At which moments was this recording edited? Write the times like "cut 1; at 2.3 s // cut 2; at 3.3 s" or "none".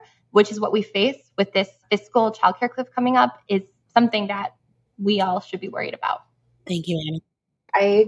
none